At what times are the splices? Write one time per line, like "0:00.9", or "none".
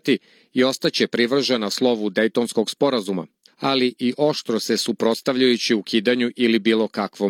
0:03.5